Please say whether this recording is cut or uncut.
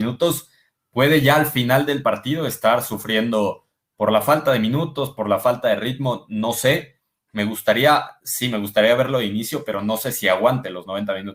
uncut